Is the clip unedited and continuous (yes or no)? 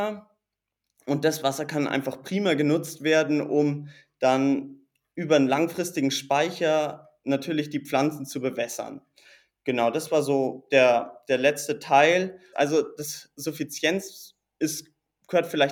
no